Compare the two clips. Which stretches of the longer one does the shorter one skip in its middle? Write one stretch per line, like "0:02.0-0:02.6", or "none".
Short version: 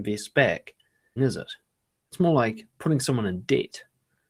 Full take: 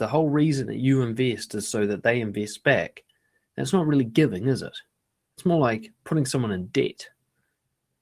0:03.5-0:04.4